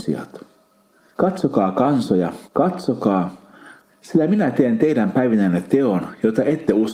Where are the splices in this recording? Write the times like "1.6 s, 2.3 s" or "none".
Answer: 1.1 s, 2.4 s, 3.9 s